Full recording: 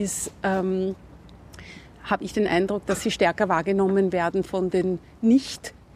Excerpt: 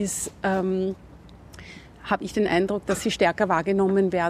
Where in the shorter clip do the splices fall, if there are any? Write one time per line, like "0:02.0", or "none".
none